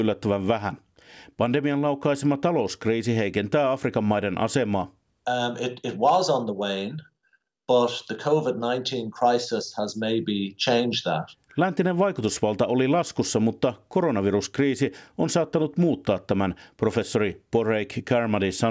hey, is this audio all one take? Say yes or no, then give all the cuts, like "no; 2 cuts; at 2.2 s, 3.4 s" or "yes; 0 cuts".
yes; 0 cuts